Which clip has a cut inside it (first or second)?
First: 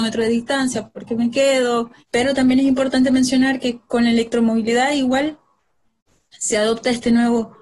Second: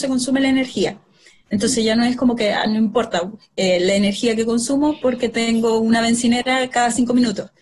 first